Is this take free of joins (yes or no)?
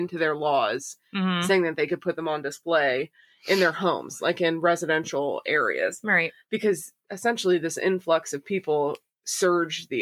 yes